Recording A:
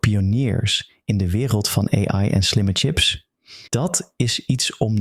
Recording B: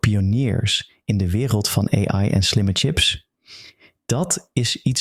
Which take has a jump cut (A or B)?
A